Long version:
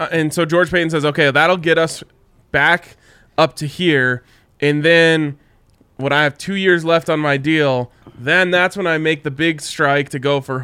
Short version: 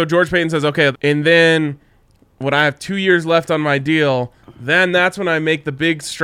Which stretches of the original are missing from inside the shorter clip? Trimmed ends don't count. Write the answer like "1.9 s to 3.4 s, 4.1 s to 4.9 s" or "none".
1.3 s to 4.5 s